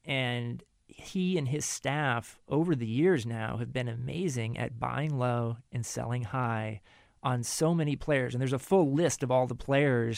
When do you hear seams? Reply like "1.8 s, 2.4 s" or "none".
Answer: none